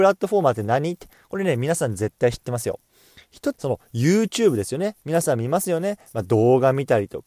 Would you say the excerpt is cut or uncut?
cut